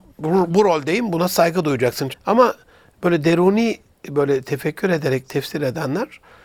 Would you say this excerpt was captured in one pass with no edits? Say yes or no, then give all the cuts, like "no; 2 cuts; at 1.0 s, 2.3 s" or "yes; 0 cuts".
no; 1 cut; at 2.1 s